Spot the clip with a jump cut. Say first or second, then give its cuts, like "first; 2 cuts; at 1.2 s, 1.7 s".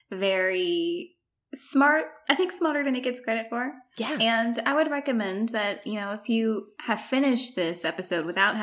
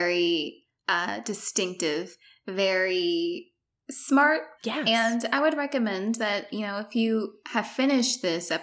second; 1 cut; at 4.6 s